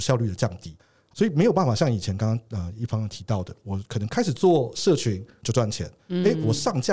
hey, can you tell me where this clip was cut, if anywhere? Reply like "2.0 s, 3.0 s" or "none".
1.1 s, 3.6 s